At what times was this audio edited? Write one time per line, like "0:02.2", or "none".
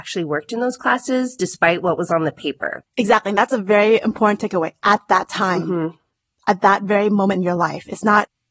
0:02.8

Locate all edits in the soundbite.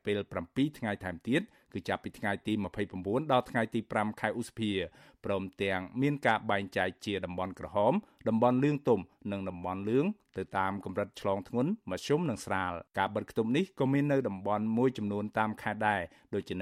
0:12.9

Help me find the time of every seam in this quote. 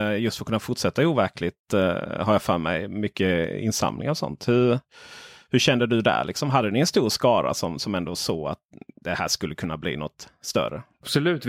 none

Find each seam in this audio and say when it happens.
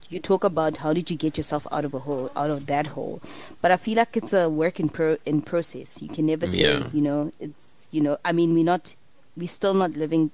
none

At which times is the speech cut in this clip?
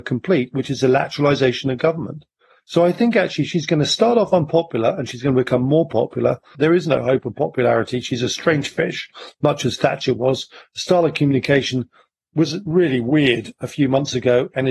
0:06.5

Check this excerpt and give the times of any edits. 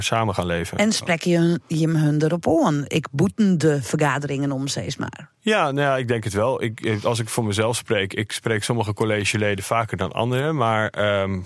none

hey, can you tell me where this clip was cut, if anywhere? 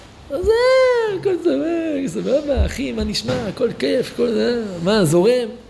none

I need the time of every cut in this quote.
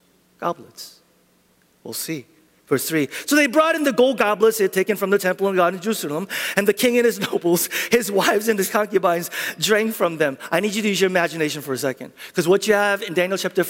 none

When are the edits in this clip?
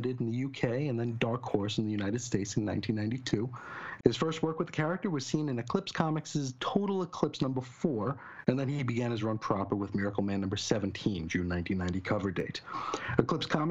0:04.0

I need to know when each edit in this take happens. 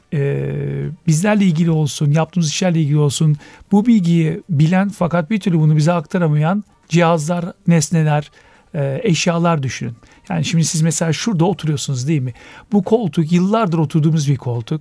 none

